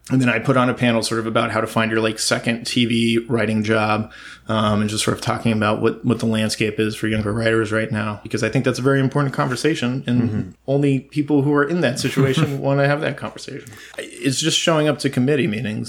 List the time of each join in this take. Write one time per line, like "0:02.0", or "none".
0:10.6
0:13.9

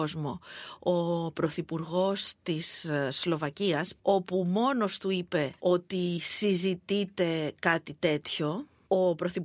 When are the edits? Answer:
0:04.0

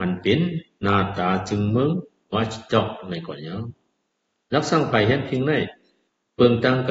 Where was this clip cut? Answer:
none

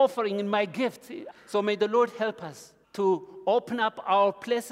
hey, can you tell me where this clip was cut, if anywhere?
0:01.3
0:02.8

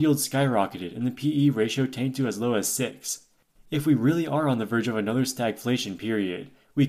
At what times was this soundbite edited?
0:03.6

